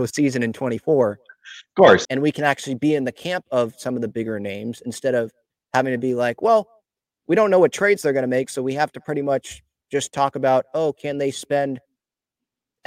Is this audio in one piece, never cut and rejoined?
no; 1 cut; at 2.0 s

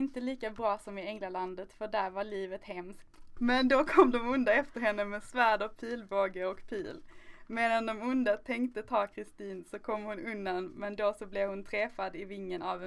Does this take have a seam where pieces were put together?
yes; 1 cut; at 3.4 s

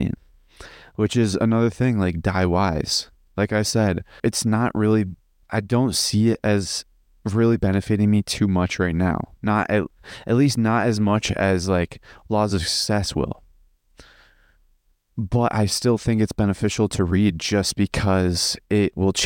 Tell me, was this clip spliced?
yes; 2 cuts; at 4.2 s, 9.4 s

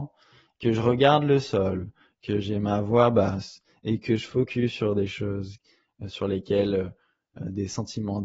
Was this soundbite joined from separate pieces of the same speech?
no; 0 cuts

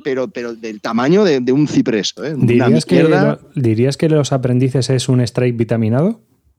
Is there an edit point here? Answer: yes; 1 cut; at 2.2 s

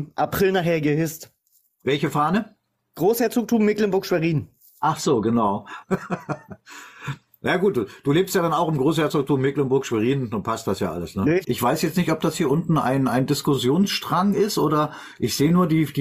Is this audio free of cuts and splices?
no; 2 cuts; at 5.8 s, 11.4 s

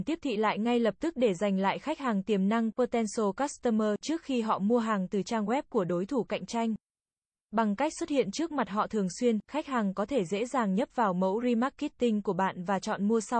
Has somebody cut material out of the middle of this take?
no; 0 cuts

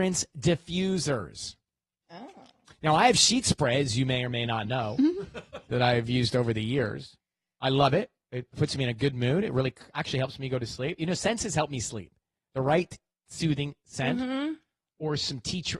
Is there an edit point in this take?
no; 0 cuts

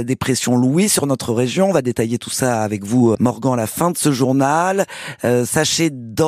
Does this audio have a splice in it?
yes; 1 cut; at 3.1 s

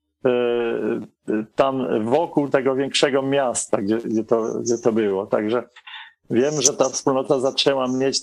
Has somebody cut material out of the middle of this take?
yes; 1 cut; at 2.5 s

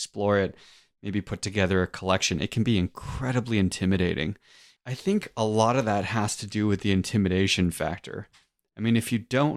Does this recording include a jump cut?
yes; 1 cut; at 4.8 s

